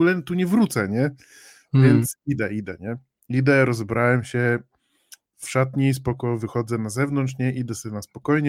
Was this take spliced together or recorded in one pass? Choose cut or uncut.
uncut